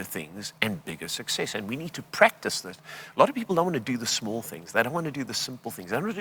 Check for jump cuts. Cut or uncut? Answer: uncut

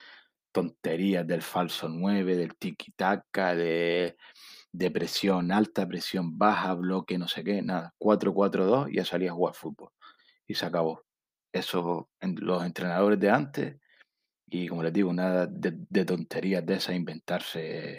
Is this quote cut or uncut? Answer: uncut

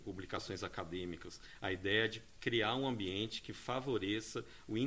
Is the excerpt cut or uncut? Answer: uncut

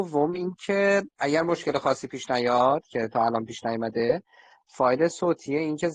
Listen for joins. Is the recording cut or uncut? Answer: uncut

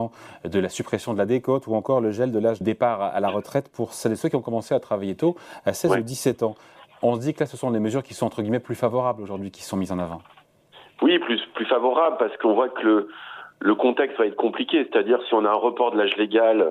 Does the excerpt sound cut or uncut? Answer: cut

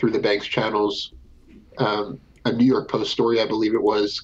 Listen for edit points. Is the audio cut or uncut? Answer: uncut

